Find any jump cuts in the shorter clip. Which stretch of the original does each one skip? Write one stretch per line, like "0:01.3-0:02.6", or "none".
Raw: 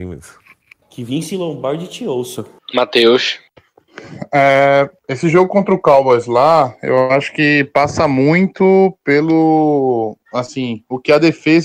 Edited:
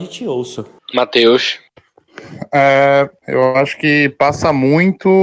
0:05.0-0:06.8